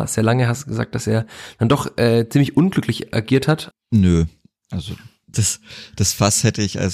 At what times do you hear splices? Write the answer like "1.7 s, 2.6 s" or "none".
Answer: 3.7 s, 5.3 s